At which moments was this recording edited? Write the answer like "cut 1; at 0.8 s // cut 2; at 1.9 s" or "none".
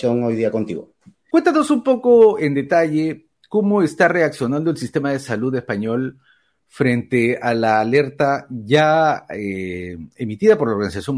cut 1; at 1.3 s